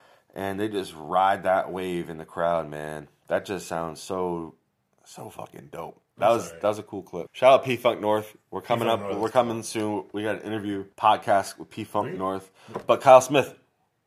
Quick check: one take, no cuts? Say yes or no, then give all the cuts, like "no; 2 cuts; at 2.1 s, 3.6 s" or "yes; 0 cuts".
no; 2 cuts; at 7.3 s, 10.9 s